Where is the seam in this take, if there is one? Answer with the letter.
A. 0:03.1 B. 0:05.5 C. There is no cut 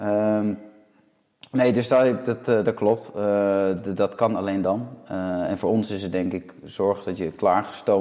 C